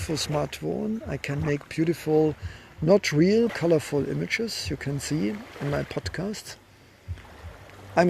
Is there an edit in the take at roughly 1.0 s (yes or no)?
no